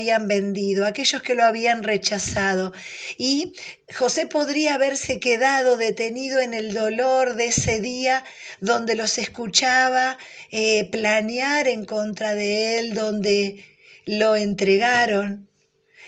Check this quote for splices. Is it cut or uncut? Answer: uncut